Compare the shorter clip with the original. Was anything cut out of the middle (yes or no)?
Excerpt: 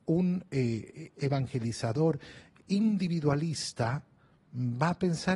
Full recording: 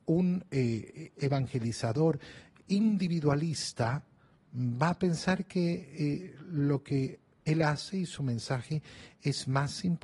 no